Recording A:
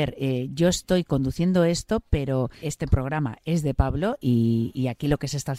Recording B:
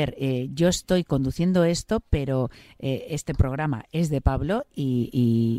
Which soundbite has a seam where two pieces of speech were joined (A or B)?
A